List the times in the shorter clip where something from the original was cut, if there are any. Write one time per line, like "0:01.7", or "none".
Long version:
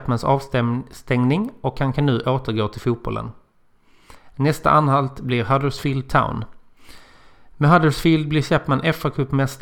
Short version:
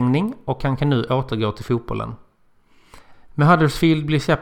0:03.1